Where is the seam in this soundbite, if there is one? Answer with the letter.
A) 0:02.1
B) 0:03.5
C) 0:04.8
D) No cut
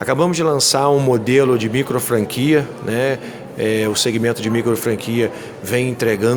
D